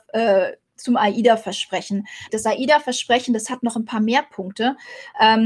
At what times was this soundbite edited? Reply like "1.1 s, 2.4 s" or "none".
2.3 s